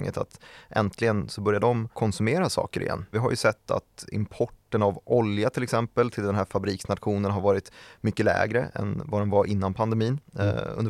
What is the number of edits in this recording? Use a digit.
2